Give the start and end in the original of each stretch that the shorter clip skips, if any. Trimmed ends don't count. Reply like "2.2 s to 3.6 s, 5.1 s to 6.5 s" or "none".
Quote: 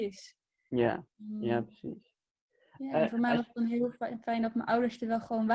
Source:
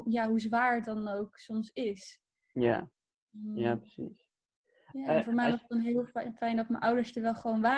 3.0 s to 3.3 s